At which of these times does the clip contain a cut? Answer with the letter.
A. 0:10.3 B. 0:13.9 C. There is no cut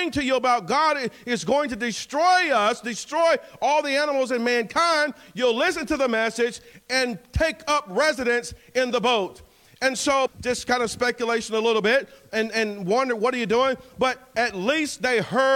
A